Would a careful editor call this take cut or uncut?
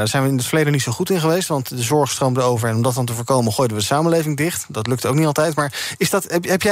uncut